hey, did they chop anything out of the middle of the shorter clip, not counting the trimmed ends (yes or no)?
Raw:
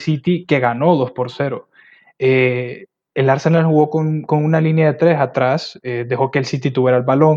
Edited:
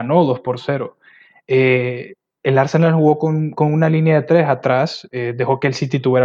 no